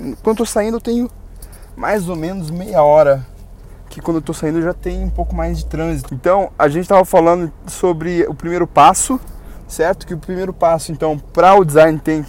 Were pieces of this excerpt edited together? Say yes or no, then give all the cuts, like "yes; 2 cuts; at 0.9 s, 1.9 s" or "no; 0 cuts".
yes; 1 cut; at 6.1 s